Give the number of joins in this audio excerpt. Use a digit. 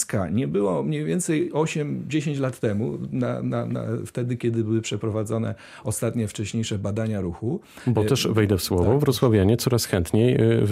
0